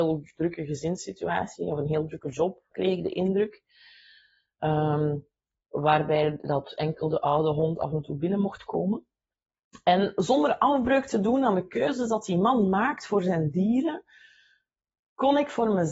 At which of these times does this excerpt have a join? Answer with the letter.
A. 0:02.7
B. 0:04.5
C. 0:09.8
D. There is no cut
A